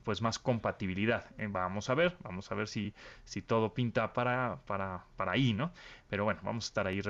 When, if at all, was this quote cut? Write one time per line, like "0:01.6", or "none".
none